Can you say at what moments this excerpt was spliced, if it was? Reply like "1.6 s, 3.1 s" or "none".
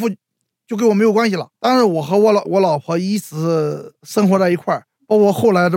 2.4 s